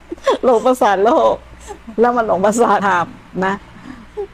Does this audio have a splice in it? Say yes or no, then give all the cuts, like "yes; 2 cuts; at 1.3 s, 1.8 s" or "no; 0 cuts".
yes; 1 cut; at 2.8 s